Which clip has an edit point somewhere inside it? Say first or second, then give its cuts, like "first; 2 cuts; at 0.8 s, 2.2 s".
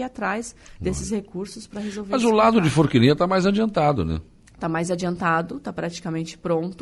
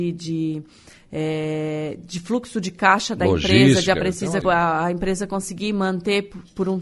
second; 1 cut; at 4.4 s